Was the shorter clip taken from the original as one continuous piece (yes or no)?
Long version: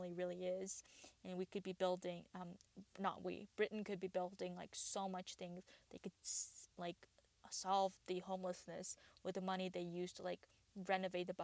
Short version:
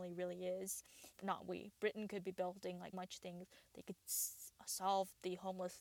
no